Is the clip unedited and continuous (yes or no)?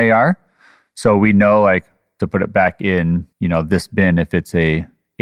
no